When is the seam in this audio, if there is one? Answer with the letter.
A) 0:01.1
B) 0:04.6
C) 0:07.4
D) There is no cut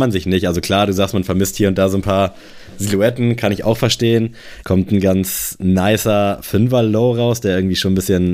B